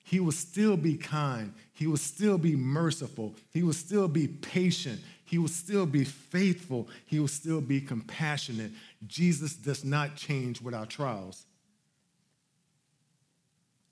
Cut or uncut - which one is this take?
uncut